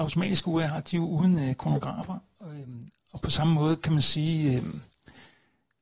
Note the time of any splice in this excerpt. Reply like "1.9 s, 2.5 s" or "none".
3.2 s